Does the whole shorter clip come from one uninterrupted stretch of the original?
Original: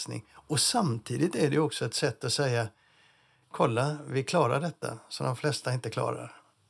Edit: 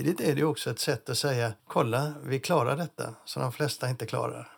no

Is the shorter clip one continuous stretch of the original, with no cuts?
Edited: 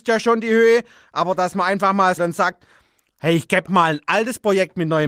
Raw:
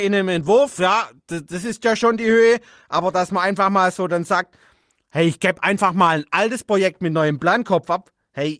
no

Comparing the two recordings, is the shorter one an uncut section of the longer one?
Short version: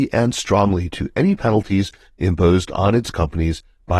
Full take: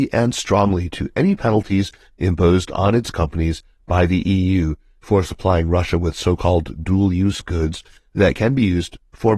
yes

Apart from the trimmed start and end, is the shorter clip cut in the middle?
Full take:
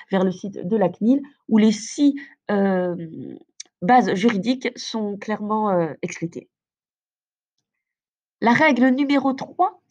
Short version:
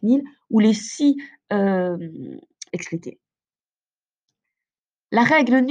yes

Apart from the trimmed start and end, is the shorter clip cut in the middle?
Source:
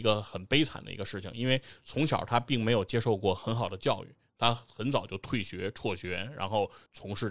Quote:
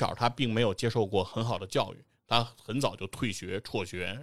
no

